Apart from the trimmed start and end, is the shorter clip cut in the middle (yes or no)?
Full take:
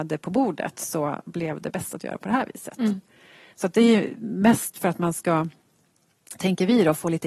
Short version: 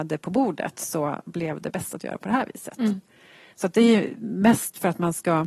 no